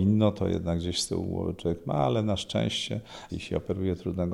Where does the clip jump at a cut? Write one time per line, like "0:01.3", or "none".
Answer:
0:03.3